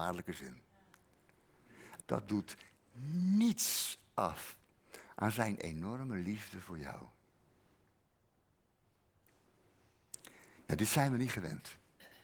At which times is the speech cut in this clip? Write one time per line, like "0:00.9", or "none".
0:02.0